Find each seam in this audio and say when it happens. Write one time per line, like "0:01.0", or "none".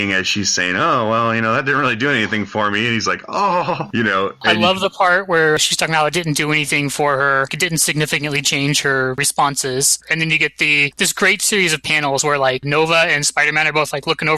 0:10.0